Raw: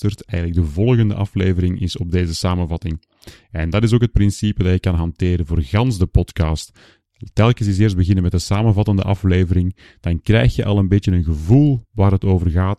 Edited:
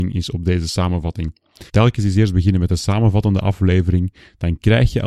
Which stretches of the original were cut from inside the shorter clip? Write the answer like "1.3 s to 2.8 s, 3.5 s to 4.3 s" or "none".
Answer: 3.4 s to 7.3 s